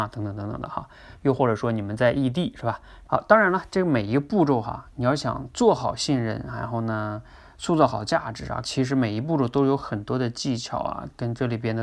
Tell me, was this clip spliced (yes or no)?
yes